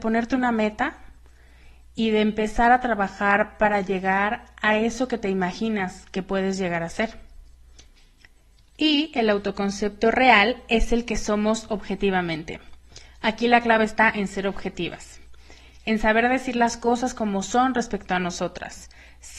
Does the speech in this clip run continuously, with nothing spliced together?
yes; 0 cuts

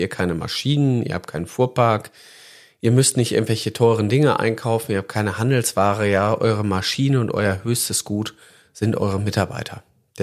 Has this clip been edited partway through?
no; 0 cuts

